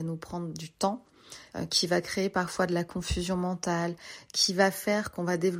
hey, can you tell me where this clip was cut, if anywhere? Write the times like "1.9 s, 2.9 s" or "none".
1.5 s